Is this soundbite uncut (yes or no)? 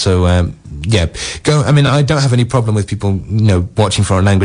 yes